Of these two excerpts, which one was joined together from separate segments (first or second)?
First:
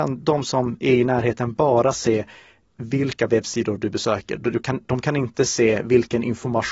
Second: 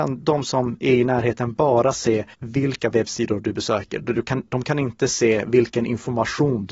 second